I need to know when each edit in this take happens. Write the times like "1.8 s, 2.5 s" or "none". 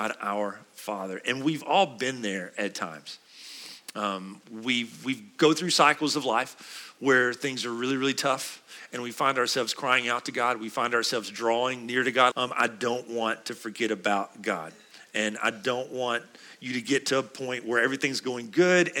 12.3 s

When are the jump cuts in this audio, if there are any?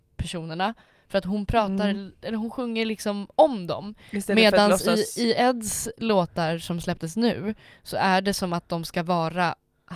none

